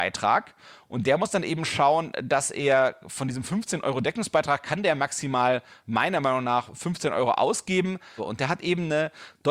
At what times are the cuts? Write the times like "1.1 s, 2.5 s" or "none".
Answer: 8.2 s